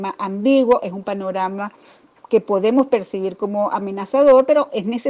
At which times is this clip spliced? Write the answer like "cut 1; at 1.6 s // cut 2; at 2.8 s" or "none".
cut 1; at 2.1 s

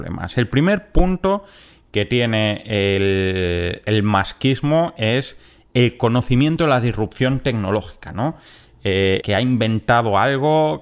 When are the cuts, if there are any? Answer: cut 1; at 3.8 s // cut 2; at 9.2 s

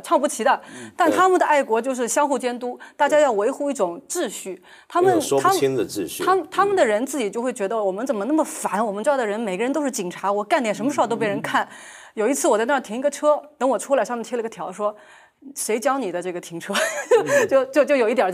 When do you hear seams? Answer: none

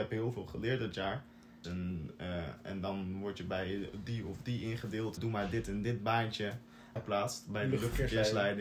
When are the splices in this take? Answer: cut 1; at 1.6 s // cut 2; at 5.2 s // cut 3; at 7.0 s

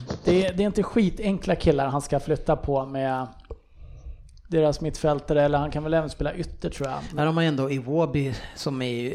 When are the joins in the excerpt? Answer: cut 1; at 7.2 s

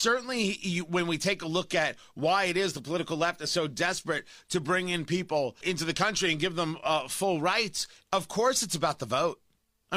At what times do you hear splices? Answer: cut 1; at 5.6 s

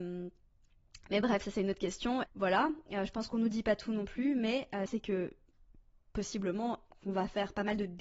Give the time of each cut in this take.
cut 1; at 2.2 s // cut 2; at 4.9 s

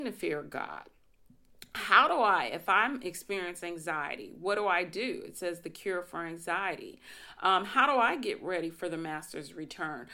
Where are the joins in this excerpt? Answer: none

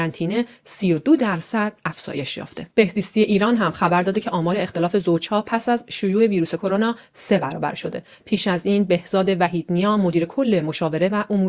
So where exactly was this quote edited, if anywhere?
cut 1; at 2.7 s

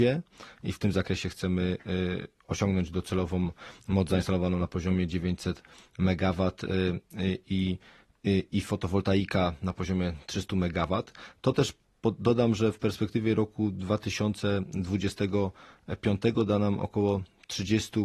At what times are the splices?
none

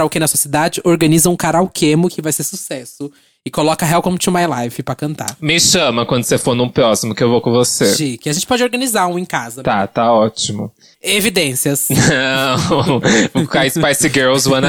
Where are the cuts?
cut 1; at 10.9 s

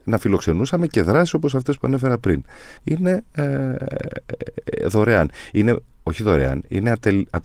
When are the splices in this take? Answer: cut 1; at 2.8 s

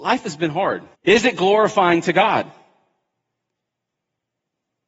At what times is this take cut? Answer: cut 1; at 0.9 s

